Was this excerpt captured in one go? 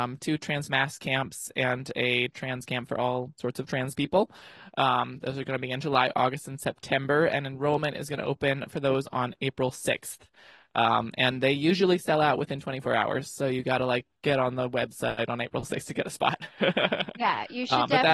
yes; 0 cuts

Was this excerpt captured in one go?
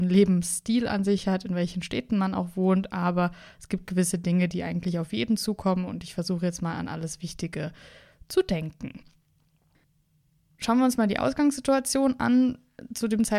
yes; 0 cuts

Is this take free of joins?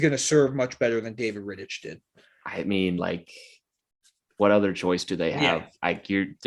yes; 0 cuts

